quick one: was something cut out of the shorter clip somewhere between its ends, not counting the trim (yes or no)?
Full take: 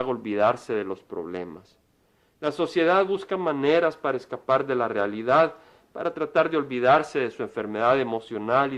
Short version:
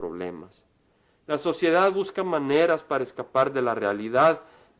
no